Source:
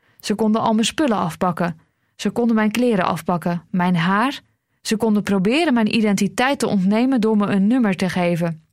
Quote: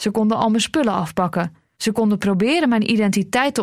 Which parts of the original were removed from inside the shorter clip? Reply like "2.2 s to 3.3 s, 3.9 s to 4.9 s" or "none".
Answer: 2.0 s to 4.8 s